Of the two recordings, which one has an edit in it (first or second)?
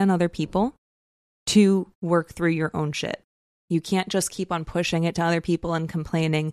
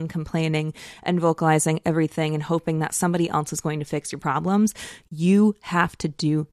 first